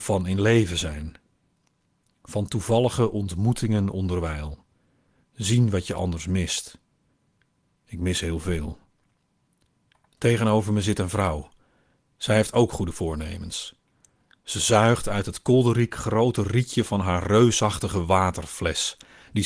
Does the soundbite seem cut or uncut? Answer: cut